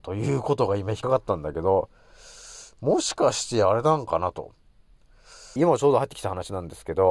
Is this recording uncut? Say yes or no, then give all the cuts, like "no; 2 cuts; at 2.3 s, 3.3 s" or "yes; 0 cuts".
no; 2 cuts; at 1.0 s, 5.6 s